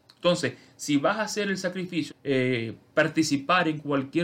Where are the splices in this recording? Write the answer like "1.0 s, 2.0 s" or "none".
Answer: 2.1 s

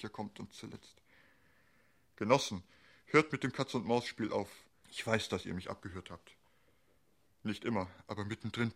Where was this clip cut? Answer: 4.8 s, 7.2 s

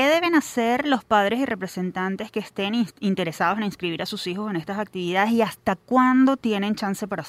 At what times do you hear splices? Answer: none

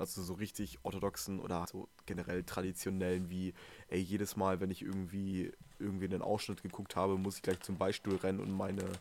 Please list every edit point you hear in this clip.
1.6 s

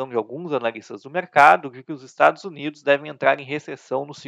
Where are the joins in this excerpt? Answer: none

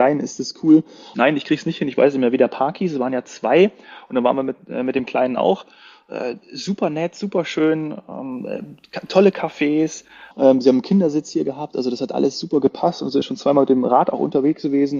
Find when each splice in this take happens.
1.1 s, 10.3 s

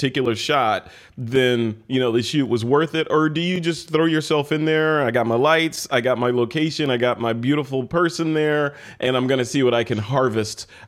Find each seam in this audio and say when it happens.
none

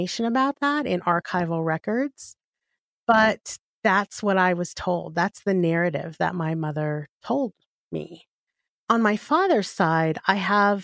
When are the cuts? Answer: none

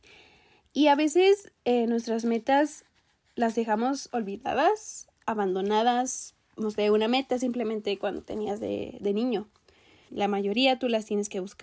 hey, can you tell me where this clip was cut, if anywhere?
10.1 s

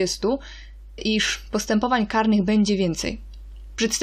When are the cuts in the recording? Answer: 1.0 s

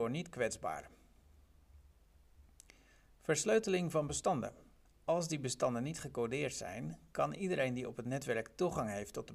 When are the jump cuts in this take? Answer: 4.9 s

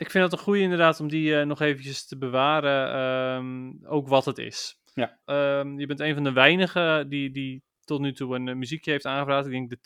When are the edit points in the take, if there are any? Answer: 5.2 s

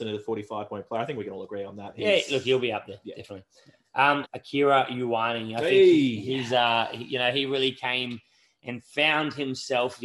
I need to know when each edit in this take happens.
4.2 s

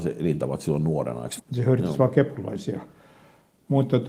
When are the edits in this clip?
1.4 s

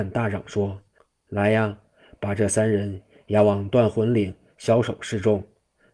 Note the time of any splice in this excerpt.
none

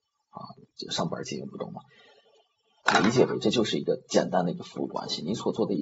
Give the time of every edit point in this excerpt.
2.8 s

